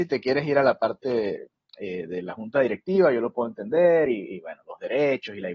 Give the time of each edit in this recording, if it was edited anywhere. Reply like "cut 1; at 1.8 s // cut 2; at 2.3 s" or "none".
none